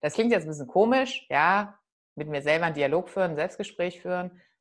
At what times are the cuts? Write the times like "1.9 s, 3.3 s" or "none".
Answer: none